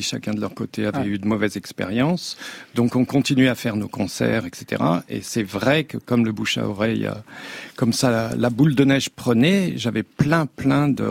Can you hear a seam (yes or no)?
no